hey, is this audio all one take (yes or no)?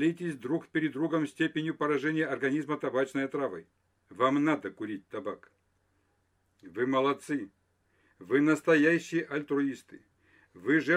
no